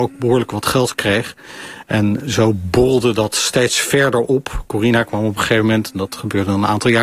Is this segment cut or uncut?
uncut